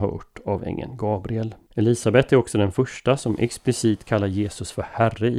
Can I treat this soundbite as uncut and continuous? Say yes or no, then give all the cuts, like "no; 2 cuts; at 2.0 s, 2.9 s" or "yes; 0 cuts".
no; 1 cut; at 1.6 s